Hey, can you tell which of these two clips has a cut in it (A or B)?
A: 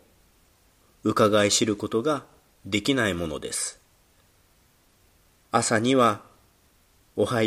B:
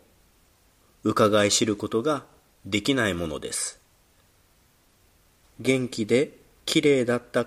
B